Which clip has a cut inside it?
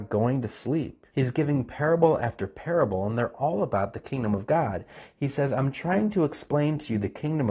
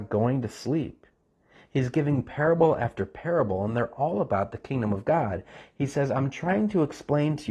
first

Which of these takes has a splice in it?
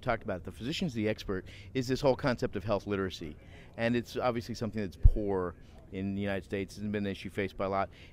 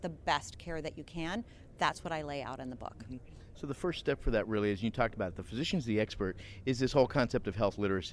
first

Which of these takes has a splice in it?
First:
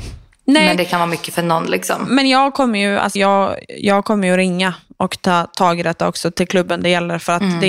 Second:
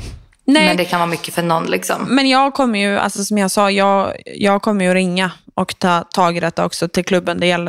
first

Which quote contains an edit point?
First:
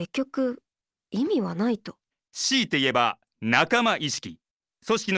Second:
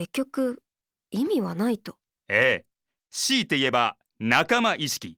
first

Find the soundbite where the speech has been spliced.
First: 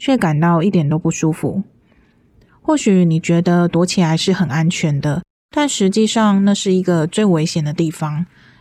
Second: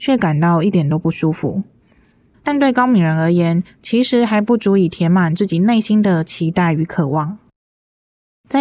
second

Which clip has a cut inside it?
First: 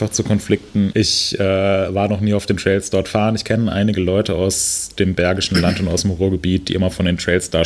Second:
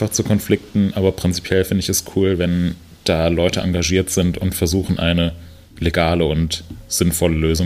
first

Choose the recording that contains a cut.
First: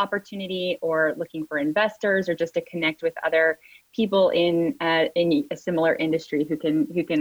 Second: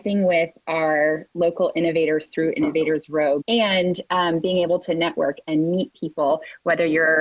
second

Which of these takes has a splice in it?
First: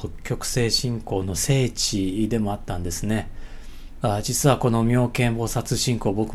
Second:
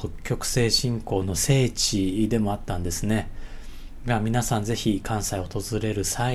first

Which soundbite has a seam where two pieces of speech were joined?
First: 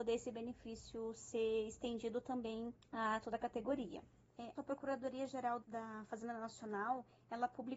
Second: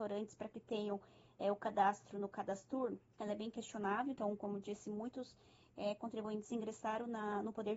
first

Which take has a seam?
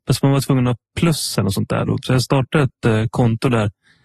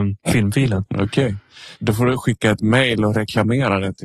second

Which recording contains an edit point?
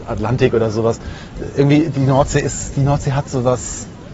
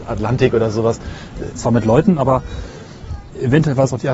second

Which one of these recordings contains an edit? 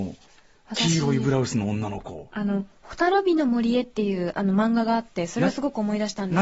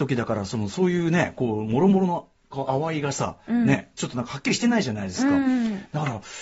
first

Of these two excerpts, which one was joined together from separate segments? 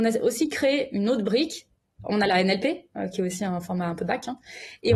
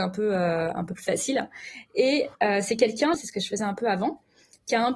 second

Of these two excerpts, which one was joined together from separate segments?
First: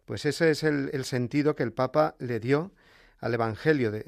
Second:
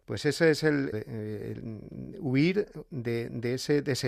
second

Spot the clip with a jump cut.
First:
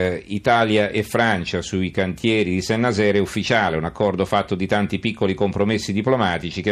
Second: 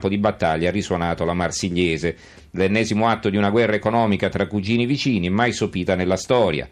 second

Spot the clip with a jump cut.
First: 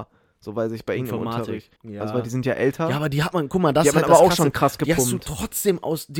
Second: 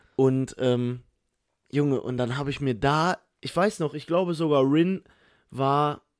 first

